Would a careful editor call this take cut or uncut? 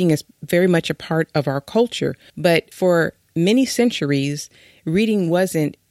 uncut